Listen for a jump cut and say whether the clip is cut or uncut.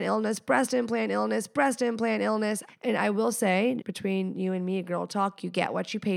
cut